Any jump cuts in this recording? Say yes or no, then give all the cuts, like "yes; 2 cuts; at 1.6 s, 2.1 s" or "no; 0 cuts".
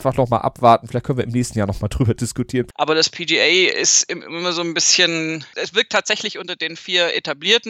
yes; 2 cuts; at 2.7 s, 5.5 s